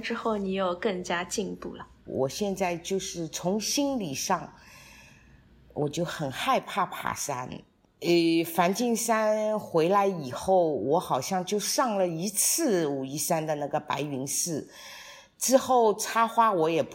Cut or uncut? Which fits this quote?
cut